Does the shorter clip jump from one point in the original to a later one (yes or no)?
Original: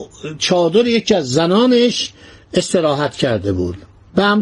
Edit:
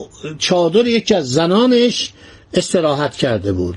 no